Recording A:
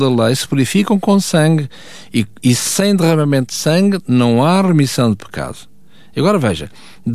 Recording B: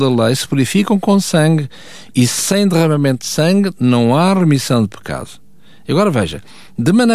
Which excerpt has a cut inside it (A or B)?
B